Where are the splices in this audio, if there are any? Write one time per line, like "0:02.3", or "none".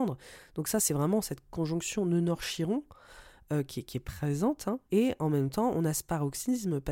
0:04.9

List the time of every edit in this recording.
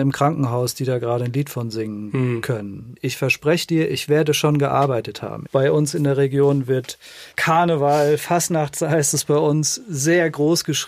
0:03.0
0:05.5
0:07.3

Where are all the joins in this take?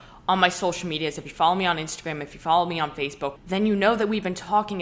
0:03.4

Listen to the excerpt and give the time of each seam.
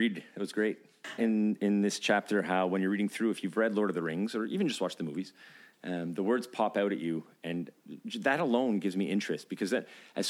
0:01.2

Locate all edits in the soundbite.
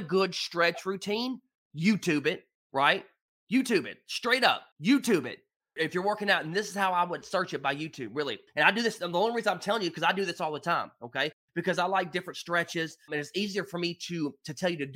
0:04.7

